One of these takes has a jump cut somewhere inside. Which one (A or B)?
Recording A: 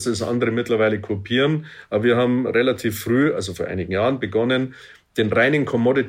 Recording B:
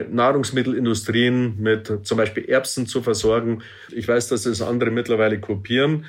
B